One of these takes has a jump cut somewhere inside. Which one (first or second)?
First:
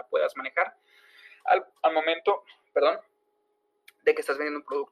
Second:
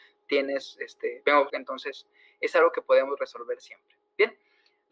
second